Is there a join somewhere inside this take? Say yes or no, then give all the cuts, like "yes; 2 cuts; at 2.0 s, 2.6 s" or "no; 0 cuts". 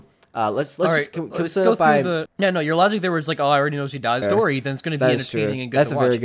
yes; 2 cuts; at 2.3 s, 4.2 s